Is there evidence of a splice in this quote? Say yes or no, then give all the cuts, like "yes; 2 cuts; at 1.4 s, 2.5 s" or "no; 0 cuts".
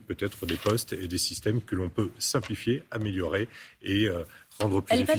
no; 0 cuts